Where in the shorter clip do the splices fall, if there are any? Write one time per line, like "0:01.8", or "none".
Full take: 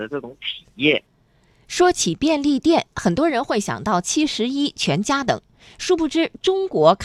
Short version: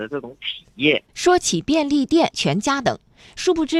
0:01.1
0:02.3